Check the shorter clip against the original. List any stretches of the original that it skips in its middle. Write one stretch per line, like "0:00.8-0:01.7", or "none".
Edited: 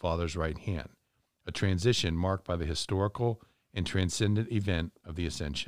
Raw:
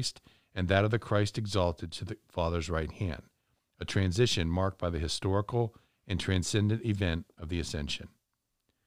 none